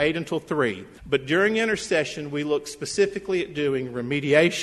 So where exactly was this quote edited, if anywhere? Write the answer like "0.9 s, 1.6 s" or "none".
1.0 s

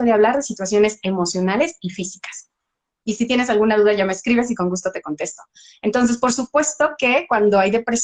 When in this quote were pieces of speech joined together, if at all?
3.0 s

